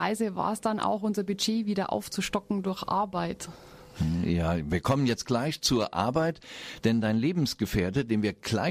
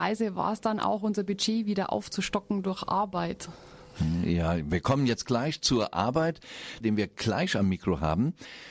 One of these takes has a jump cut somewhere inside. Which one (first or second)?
second